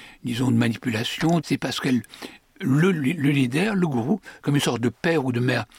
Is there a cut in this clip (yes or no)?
yes